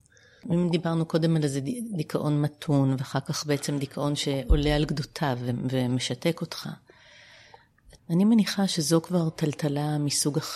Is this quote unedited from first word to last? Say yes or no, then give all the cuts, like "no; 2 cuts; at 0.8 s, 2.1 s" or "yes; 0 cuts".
no; 1 cut; at 8.0 s